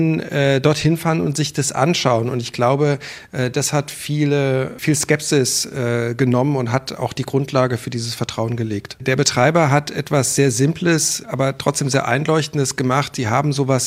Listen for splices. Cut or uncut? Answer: cut